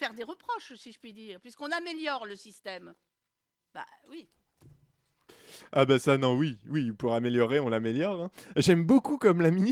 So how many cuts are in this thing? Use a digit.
0